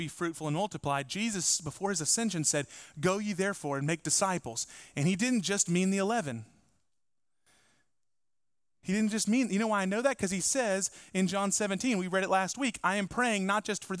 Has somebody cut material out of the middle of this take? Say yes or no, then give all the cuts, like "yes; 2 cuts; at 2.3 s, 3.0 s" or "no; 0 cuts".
no; 0 cuts